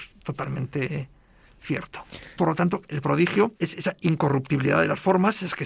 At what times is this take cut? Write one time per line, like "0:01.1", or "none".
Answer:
0:02.4
0:03.6